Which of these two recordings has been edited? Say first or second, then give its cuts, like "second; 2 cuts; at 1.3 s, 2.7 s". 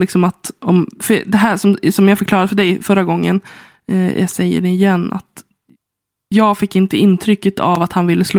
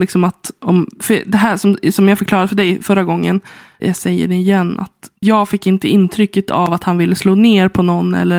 second; 2 cuts; at 3.8 s, 5.2 s